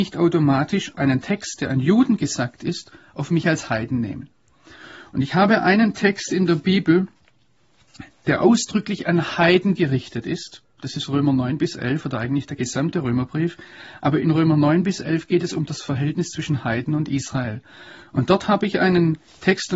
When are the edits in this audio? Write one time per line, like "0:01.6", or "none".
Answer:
0:08.2